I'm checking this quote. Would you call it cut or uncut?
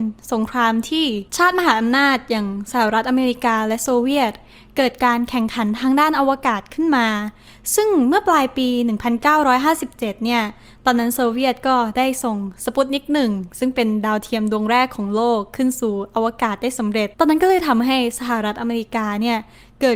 cut